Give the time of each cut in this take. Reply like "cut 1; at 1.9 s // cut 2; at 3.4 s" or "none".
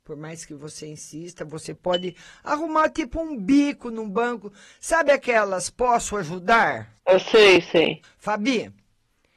cut 1; at 7.0 s // cut 2; at 8.0 s